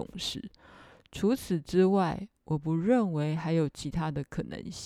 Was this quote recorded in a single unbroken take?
yes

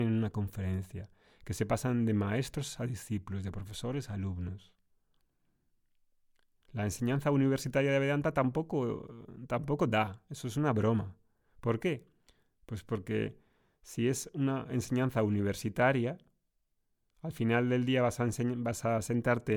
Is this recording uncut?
yes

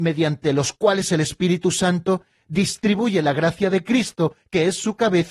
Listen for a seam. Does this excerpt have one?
no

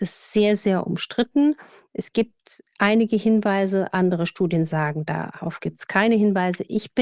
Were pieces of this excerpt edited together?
no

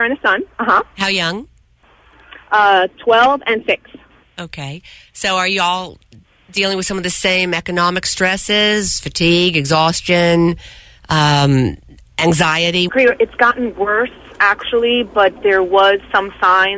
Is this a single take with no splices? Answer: no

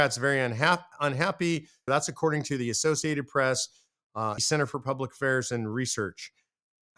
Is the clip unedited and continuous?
no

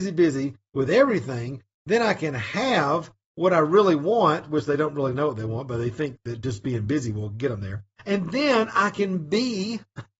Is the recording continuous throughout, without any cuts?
yes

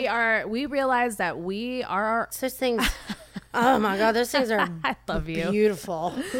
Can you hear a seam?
yes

